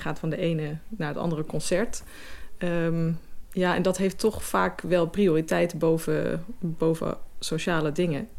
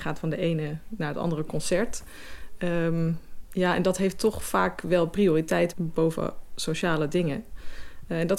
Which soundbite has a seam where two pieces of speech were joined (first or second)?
second